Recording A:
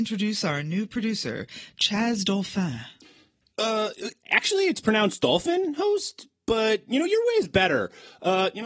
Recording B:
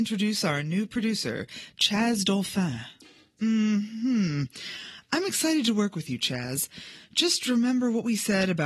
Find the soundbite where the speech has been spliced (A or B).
B